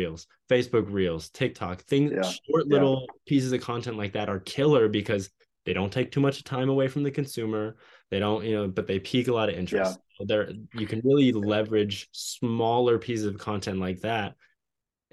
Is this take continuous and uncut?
yes; 0 cuts

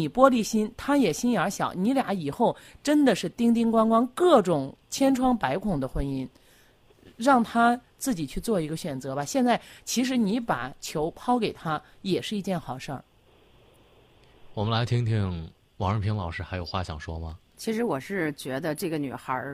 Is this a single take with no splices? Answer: yes; 0 cuts

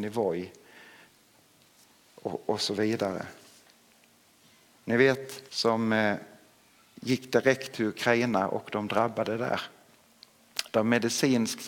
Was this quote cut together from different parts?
yes; 1 cut; at 5.5 s

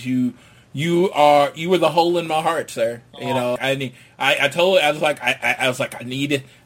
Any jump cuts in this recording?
yes; 1 cut; at 3.6 s

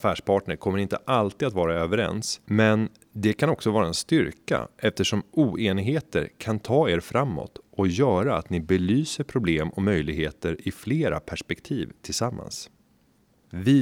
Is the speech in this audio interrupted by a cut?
no; 0 cuts

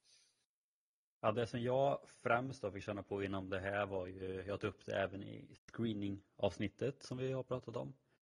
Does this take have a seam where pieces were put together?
no; 0 cuts

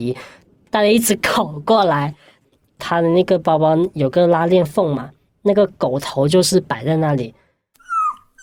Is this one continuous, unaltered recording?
yes; 0 cuts

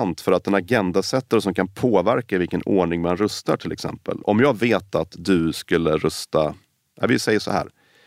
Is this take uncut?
yes; 0 cuts

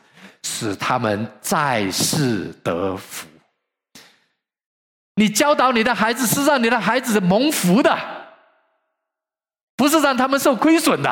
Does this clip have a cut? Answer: no; 0 cuts

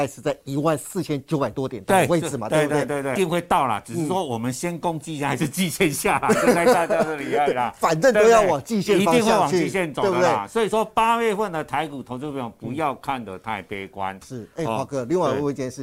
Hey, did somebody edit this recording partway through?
yes; 1 cut; at 3.2 s

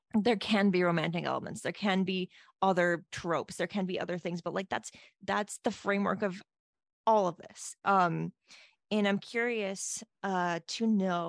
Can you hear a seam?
no; 0 cuts

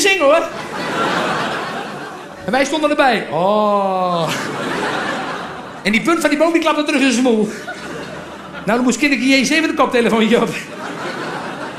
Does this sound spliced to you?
no; 0 cuts

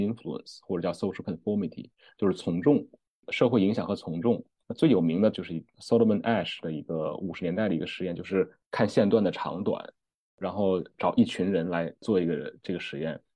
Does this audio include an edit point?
yes; 1 cut; at 5.3 s

